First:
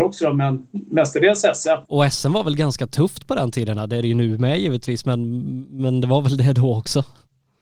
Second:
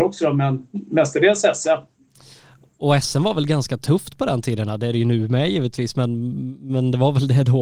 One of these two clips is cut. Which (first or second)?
first